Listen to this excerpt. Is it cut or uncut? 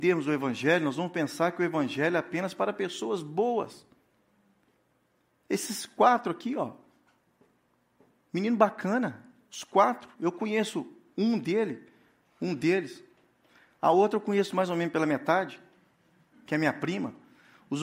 cut